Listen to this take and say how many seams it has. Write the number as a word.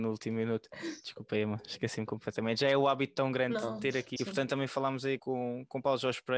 two